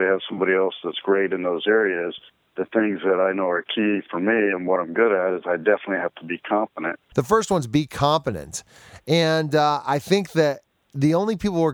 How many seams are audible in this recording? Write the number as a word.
one